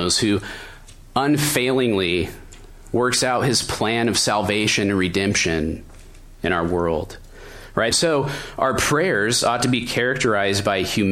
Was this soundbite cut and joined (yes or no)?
yes